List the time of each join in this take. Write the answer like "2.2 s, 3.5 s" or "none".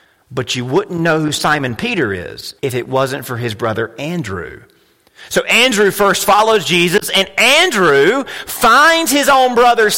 2.6 s